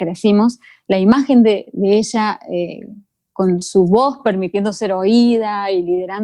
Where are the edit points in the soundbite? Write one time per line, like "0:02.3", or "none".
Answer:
none